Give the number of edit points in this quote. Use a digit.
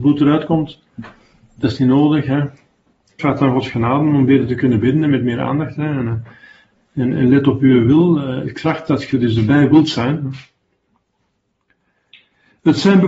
1